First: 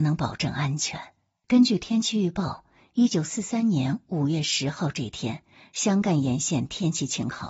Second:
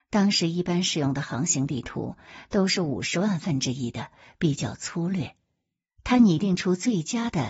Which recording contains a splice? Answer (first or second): first